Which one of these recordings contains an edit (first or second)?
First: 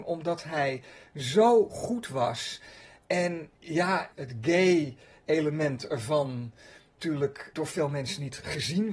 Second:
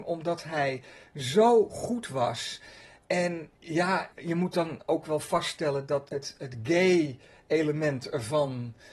first